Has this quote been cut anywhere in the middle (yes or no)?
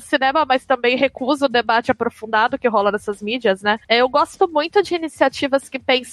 yes